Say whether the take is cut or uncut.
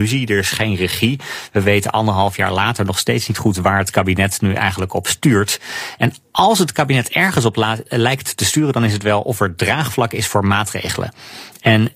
uncut